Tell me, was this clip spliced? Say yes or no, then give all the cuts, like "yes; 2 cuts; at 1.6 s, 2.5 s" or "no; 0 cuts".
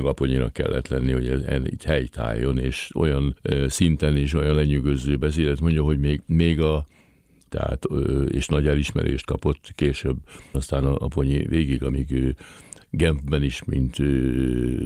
yes; 2 cuts; at 7.5 s, 10.5 s